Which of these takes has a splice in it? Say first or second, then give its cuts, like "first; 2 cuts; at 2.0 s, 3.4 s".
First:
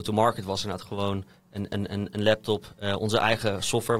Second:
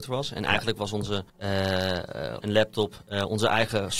second; 2 cuts; at 1.3 s, 2.4 s